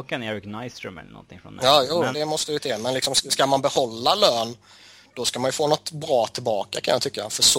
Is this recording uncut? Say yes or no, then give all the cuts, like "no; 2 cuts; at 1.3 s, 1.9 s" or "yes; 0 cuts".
no; 1 cut; at 2.1 s